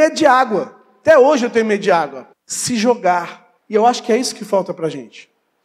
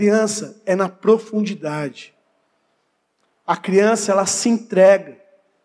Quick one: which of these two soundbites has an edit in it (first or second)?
first